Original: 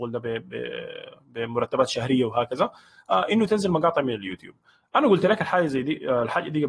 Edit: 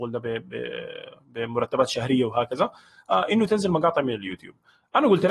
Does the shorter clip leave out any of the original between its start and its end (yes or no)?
no